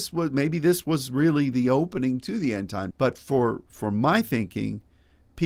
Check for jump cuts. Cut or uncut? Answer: cut